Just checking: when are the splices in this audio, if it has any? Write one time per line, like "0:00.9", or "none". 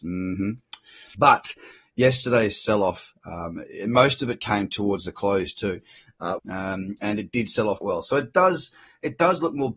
0:01.1
0:06.4
0:07.8